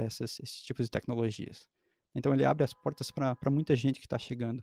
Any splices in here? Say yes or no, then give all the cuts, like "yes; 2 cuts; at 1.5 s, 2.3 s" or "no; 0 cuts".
no; 0 cuts